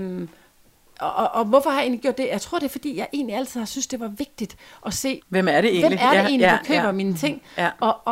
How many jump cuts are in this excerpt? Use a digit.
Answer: 1